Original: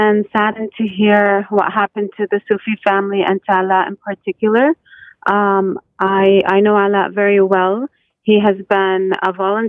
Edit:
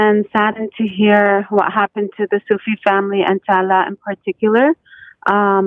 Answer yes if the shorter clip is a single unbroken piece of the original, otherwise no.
yes